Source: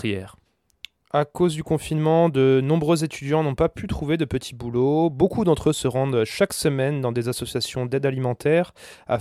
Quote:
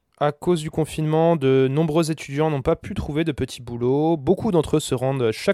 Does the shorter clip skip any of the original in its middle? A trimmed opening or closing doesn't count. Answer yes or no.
no